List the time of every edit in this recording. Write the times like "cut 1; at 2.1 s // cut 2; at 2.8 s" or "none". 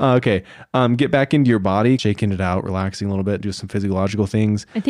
cut 1; at 2.0 s